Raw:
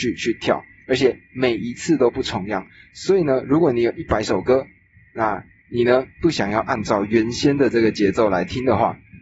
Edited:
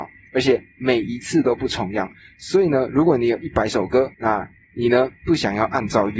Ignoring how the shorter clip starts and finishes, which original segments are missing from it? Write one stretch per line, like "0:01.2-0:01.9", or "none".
0:04.7-0:05.1